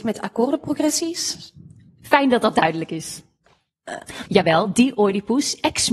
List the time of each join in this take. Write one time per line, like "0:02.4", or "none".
0:04.3